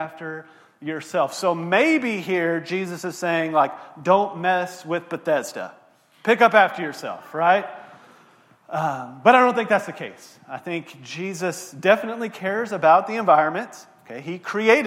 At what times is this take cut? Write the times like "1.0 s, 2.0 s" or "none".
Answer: none